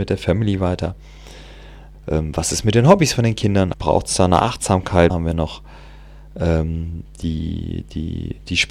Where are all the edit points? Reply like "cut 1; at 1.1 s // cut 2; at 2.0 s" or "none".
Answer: cut 1; at 1.9 s // cut 2; at 3.7 s // cut 3; at 5.1 s